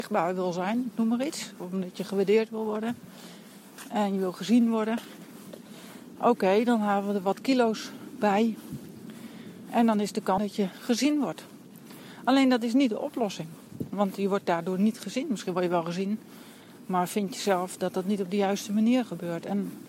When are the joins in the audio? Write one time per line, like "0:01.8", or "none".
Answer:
0:10.4